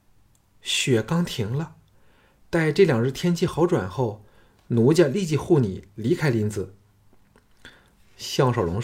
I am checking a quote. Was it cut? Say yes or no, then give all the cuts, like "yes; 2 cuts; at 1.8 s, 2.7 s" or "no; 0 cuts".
no; 0 cuts